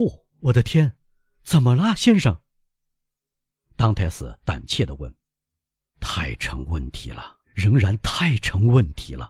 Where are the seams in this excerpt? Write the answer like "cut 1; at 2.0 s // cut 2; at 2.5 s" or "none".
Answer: cut 1; at 5.9 s // cut 2; at 7.4 s